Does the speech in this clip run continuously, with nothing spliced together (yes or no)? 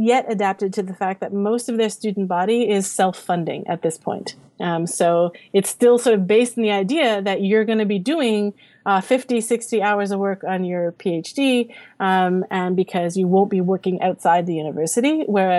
yes